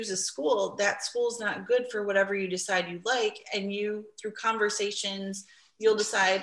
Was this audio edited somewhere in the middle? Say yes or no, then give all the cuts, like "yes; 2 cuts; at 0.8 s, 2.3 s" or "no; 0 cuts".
no; 0 cuts